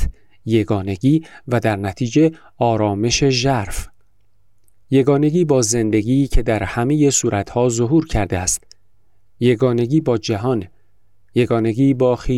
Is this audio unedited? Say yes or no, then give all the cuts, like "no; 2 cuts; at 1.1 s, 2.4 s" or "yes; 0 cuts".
yes; 0 cuts